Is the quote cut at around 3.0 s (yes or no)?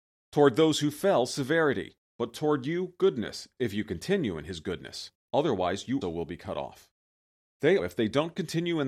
no